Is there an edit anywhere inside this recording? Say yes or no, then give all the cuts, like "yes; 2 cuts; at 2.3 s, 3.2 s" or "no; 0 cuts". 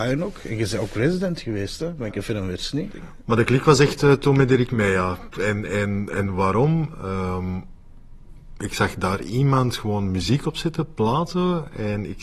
no; 0 cuts